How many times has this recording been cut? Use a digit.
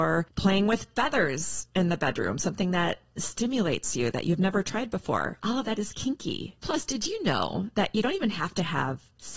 0